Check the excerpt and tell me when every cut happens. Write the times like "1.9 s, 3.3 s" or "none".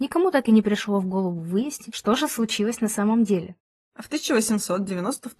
3.8 s